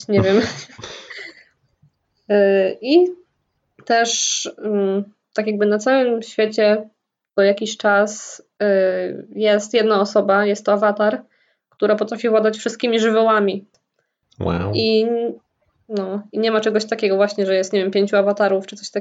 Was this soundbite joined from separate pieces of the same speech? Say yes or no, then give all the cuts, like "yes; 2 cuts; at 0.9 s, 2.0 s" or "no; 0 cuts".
no; 0 cuts